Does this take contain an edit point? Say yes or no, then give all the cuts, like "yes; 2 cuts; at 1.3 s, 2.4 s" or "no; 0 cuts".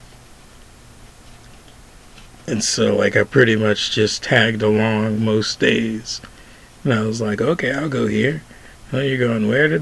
no; 0 cuts